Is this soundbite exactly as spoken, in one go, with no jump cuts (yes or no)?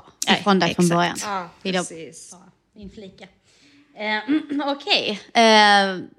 yes